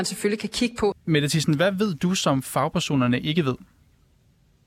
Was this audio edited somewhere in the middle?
yes; 1 cut; at 0.9 s

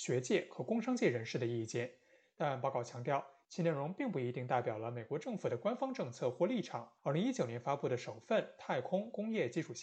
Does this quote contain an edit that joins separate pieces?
yes; 1 cut; at 7.0 s

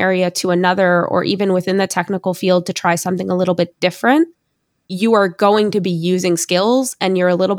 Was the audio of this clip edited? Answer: no; 0 cuts

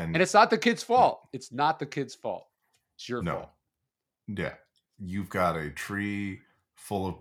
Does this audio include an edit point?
no; 0 cuts

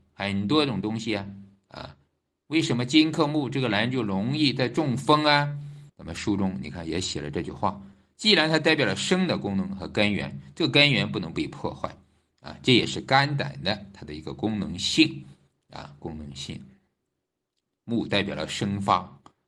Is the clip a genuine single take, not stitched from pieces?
no; 1 cut; at 5.9 s

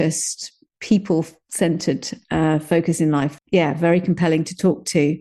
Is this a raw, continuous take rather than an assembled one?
no; 1 cut; at 3.4 s

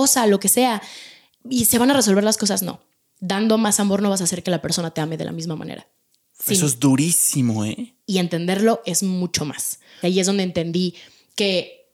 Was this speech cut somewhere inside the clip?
yes; 1 cut; at 10.0 s

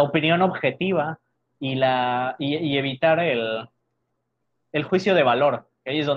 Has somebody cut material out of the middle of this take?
no; 0 cuts

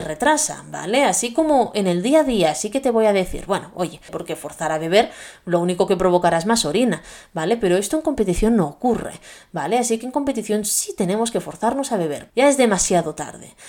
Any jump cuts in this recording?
yes; 2 cuts; at 4.1 s, 12.3 s

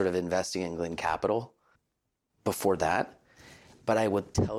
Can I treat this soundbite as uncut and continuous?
yes; 0 cuts

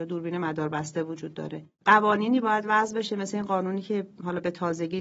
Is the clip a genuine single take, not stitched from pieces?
no; 1 cut; at 1.7 s

